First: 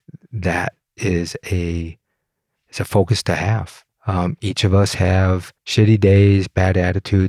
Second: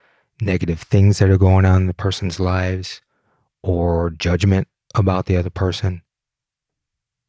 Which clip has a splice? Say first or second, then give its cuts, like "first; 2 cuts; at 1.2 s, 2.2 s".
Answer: first; 2 cuts; at 3.9 s, 5.6 s